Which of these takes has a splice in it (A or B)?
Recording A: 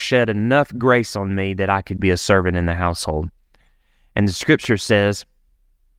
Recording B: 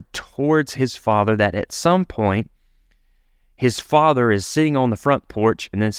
A